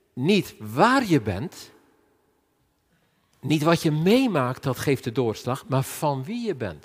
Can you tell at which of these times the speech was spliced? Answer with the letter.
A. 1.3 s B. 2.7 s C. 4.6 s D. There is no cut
D